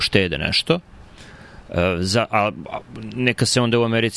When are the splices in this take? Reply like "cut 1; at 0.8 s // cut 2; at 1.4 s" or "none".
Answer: none